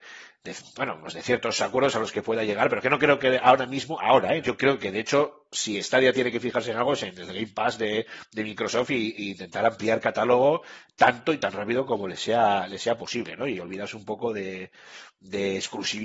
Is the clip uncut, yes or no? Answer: no